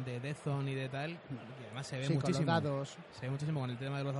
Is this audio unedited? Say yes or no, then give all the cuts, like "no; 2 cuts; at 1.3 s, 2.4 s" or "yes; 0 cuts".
yes; 0 cuts